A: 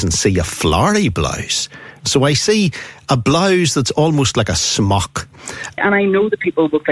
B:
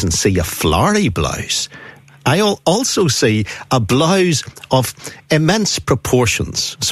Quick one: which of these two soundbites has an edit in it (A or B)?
A